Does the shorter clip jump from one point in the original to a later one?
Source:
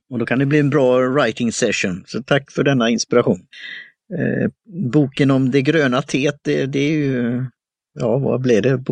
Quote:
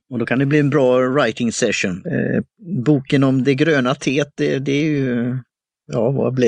yes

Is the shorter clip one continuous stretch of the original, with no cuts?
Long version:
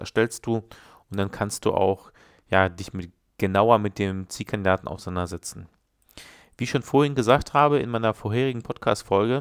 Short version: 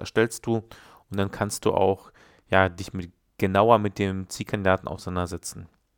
yes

